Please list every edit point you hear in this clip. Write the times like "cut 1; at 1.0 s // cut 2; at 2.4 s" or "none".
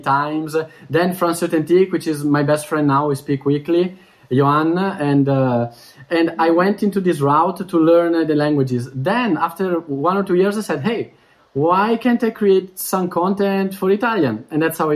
none